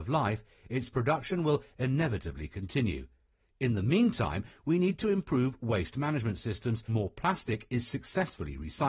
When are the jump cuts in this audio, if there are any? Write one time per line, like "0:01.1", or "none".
0:06.9